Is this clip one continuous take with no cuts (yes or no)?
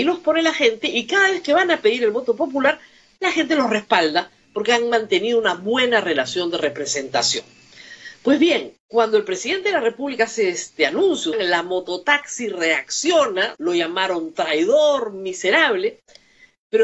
no